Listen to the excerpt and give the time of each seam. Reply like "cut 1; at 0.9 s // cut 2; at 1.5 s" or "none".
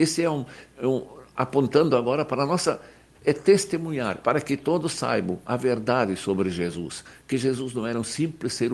cut 1; at 3.1 s // cut 2; at 4.2 s